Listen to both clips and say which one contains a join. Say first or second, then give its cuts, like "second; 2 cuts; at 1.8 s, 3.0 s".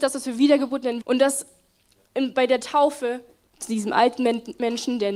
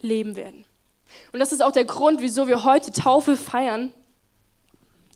first; 2 cuts; at 1.0 s, 3.5 s